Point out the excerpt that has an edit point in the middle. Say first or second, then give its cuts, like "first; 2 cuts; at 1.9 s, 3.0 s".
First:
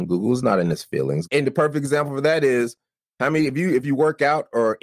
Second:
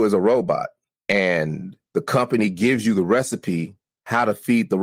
first; 1 cut; at 1.3 s